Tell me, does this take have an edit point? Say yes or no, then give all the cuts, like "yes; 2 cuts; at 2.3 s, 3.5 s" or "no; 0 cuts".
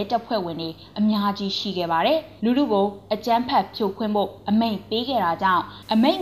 yes; 1 cut; at 2.4 s